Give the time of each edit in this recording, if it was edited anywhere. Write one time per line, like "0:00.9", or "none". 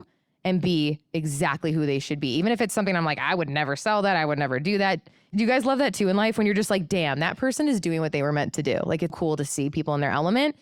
0:09.1